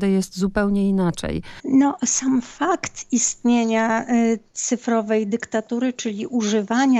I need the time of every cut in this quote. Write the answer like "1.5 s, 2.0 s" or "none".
1.6 s